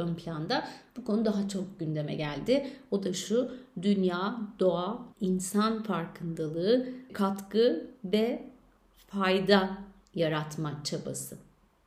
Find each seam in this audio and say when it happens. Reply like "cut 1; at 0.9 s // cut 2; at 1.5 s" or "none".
cut 1; at 5.1 s // cut 2; at 7.1 s

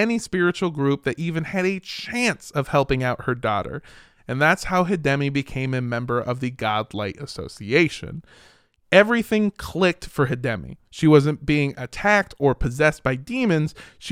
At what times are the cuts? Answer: none

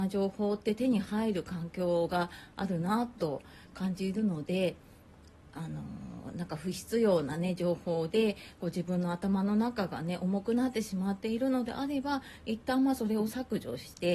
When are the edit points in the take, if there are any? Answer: none

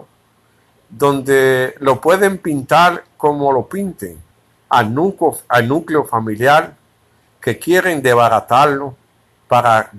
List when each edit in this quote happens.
cut 1; at 4.6 s

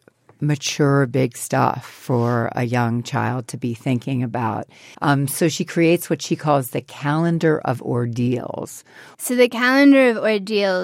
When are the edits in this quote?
cut 1; at 4.9 s // cut 2; at 9.1 s

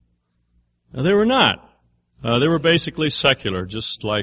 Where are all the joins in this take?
none

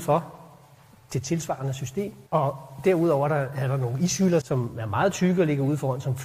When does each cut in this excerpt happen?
cut 1; at 2.3 s // cut 2; at 4.4 s

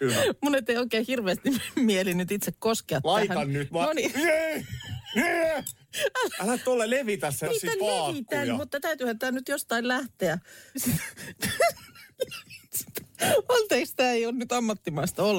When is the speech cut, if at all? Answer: cut 1; at 7.5 s // cut 2; at 10.7 s

